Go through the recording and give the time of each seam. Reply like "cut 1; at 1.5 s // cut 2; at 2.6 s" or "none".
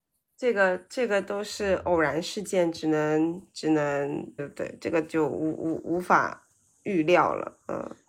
cut 1; at 4.4 s